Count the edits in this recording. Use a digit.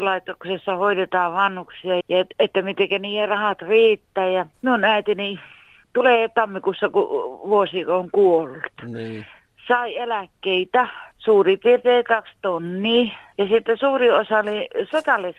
1